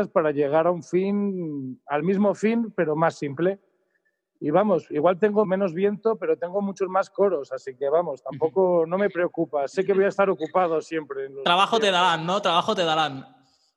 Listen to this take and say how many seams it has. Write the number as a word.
one